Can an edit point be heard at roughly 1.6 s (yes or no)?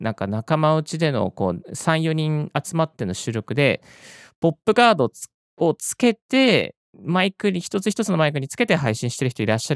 no